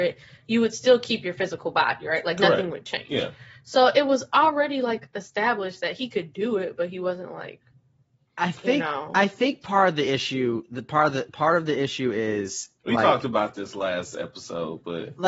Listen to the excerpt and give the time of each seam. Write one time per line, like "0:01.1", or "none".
none